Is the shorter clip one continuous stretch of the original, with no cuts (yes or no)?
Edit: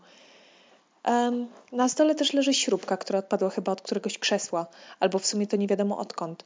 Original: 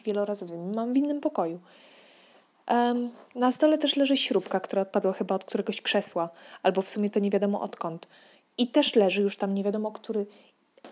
yes